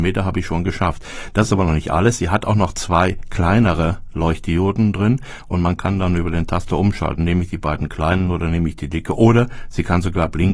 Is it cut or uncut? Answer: uncut